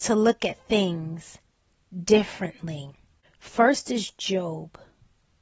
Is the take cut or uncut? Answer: uncut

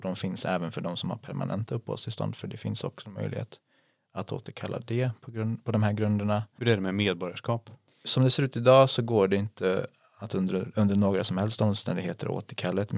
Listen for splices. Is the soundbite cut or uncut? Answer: uncut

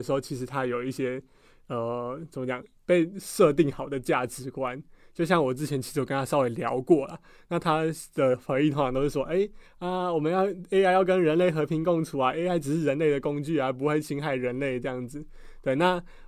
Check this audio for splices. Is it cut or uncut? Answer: uncut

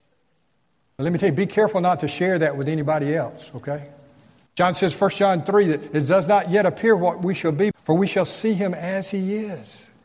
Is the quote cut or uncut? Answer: cut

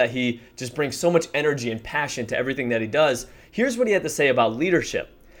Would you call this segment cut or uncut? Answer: uncut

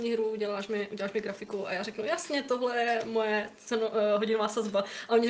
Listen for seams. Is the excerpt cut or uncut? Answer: uncut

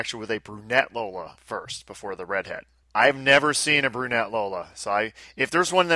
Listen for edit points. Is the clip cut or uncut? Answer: uncut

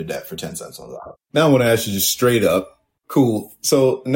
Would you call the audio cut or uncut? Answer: cut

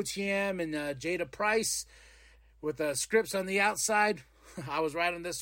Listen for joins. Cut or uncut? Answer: uncut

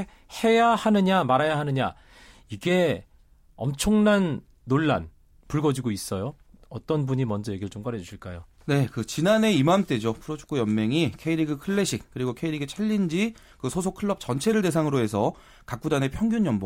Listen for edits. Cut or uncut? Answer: cut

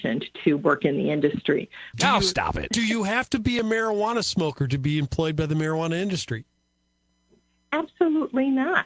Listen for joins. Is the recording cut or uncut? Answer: cut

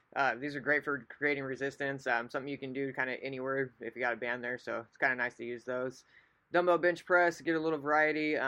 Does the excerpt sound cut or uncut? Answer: uncut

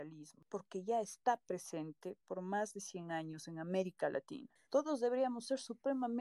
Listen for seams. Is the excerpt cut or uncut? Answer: cut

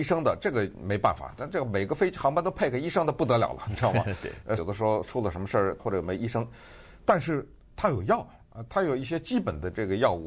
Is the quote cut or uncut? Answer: cut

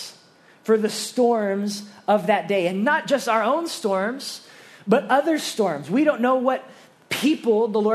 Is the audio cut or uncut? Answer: uncut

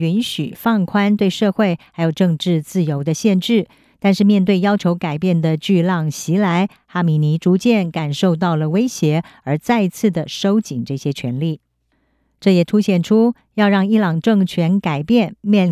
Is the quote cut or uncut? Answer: uncut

